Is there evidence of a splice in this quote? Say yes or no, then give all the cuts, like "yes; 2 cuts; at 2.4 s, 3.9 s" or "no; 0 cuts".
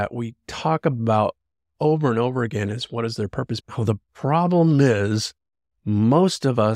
yes; 1 cut; at 3.6 s